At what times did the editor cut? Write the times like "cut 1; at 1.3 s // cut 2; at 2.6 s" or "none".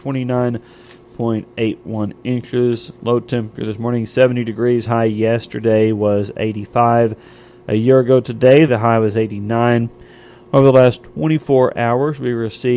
cut 1; at 8.7 s

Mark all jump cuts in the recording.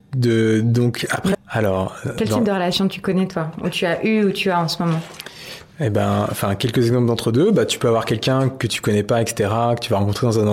cut 1; at 1.3 s

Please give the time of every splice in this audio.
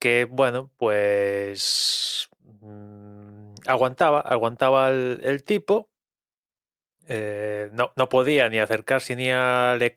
none

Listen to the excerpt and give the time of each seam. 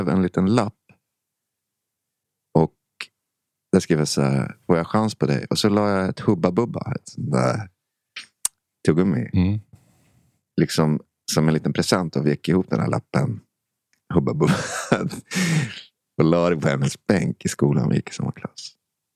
none

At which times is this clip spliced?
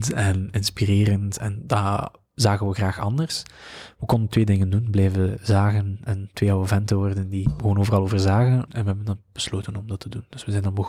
cut 1; at 8.7 s

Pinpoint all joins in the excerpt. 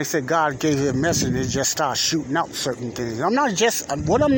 none

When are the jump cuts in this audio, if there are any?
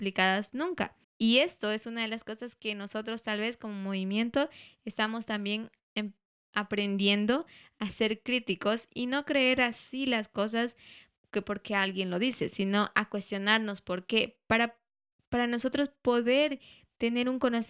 cut 1; at 1.0 s // cut 2; at 15.1 s

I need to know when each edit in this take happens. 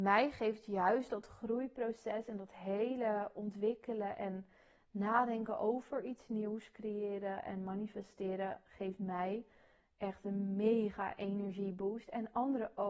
none

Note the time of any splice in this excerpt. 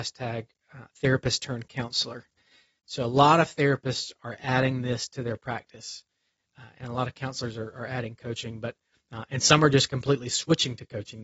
none

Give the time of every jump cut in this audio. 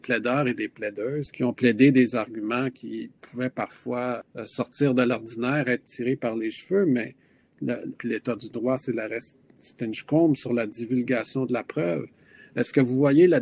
cut 1; at 7.9 s

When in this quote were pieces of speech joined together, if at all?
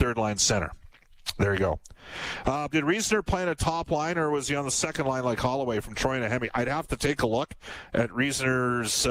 cut 1; at 2.7 s

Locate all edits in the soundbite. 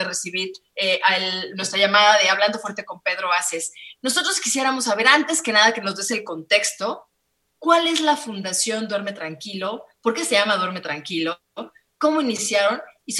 none

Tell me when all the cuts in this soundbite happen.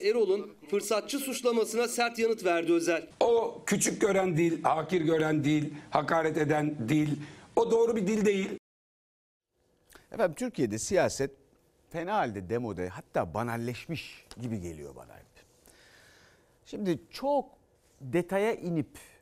none

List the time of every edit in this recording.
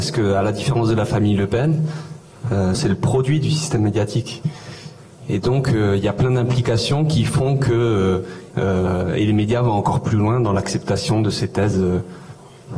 cut 1; at 2.7 s // cut 2; at 8.5 s

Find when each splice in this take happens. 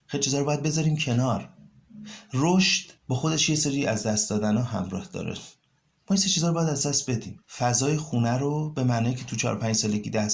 cut 1; at 3.0 s // cut 2; at 7.4 s

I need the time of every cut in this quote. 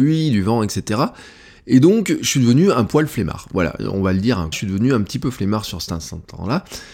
cut 1; at 4.5 s

